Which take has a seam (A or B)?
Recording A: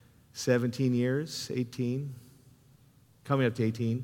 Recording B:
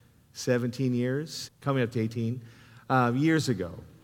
B